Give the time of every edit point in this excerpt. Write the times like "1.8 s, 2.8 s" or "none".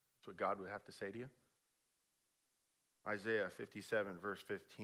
2.9 s